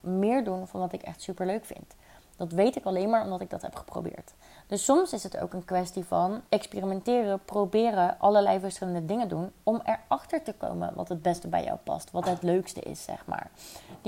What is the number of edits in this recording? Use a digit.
1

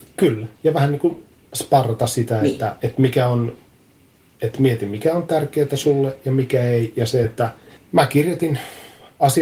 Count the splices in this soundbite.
1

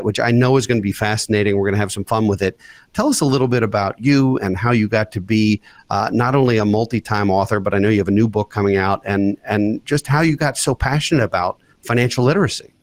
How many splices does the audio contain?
0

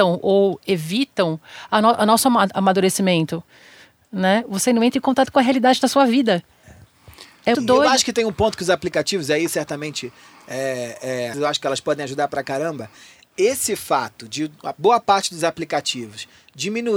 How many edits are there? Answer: 2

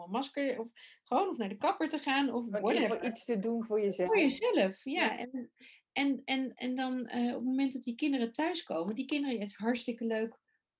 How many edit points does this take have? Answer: 0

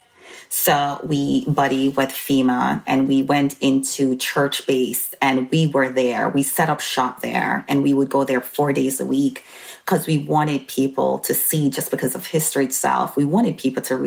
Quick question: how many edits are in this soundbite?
0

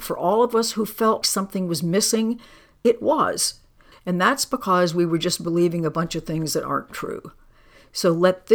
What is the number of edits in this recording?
2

